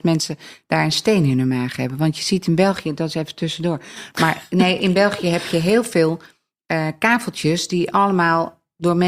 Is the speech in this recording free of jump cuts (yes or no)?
yes